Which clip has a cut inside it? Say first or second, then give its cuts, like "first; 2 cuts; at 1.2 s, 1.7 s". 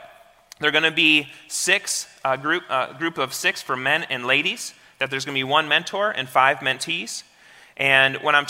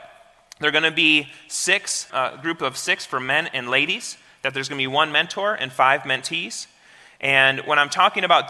second; 1 cut; at 2.1 s